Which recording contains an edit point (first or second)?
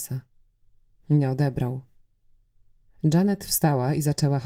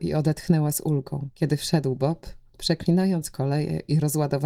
first